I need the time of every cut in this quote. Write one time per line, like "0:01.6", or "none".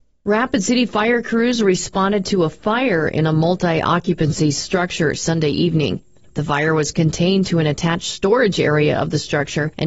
0:06.3